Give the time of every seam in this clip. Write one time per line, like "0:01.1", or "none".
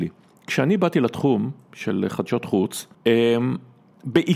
0:02.9